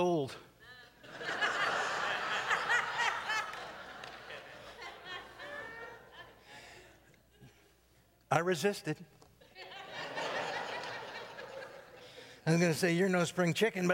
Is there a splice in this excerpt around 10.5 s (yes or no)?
no